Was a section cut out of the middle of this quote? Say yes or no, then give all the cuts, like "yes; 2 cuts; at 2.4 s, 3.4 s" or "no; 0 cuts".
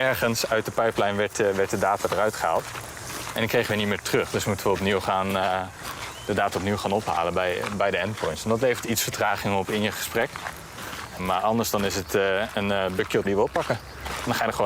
yes; 2 cuts; at 11.2 s, 13.2 s